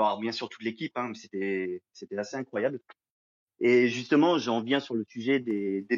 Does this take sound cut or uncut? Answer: uncut